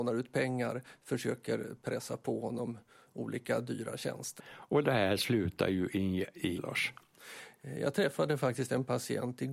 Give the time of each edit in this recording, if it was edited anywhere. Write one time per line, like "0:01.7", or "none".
0:04.4
0:06.6